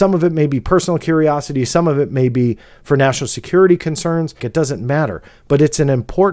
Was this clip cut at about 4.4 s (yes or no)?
yes